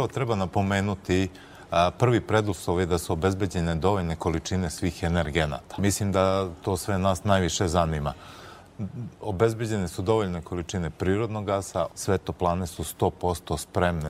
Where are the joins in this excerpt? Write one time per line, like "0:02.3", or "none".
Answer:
0:11.9